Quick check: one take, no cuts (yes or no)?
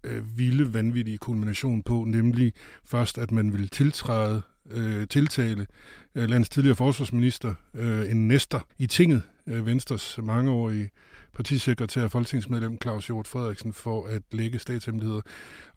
no